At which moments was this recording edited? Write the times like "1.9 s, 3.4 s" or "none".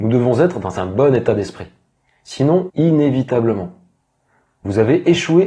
2.7 s, 4.5 s